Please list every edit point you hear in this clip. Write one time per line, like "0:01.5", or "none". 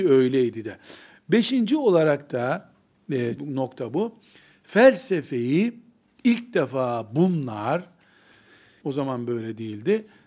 0:03.4
0:08.8